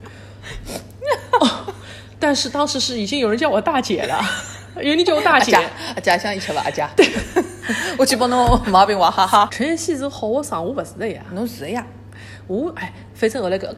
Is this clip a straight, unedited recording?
no; 1 cut; at 9.5 s

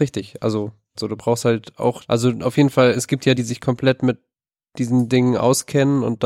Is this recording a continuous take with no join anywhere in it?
no; 3 cuts; at 1.0 s, 2.1 s, 3.4 s

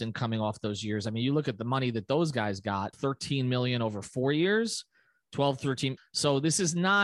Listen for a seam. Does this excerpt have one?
yes; 2 cuts; at 2.9 s, 6.0 s

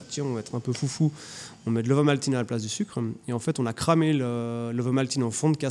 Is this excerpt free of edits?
yes; 0 cuts

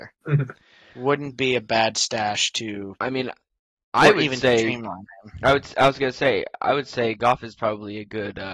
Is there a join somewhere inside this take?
no; 0 cuts

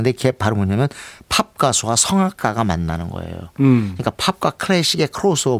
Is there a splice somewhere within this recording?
no; 0 cuts

